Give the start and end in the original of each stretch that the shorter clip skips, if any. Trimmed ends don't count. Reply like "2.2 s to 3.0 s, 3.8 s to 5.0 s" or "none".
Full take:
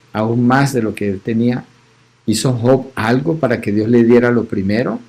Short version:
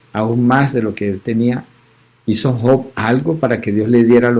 none

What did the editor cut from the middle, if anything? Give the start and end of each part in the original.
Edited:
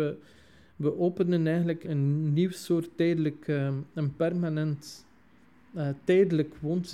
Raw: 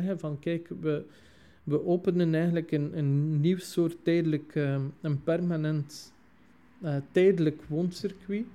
2.7 s to 2.9 s

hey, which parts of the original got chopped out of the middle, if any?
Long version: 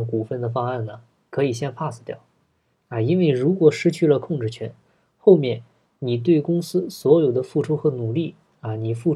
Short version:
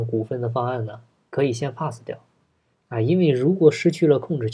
none

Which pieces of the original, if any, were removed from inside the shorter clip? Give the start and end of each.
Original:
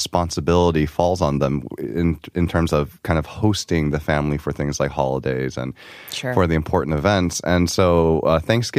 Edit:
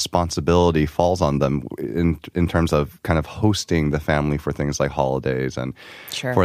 none

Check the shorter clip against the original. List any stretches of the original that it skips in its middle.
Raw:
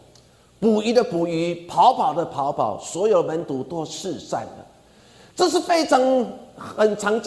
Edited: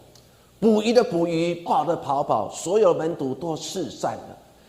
1.7 s to 1.9 s

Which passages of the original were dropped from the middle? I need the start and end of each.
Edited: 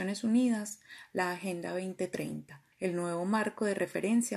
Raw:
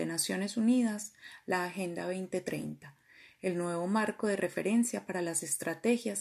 3.0 s to 3.3 s

